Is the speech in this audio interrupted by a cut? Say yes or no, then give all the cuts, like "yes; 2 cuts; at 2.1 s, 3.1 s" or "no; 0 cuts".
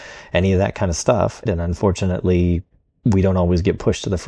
yes; 1 cut; at 1.5 s